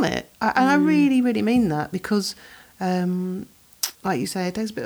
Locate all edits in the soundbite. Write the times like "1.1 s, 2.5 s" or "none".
4.0 s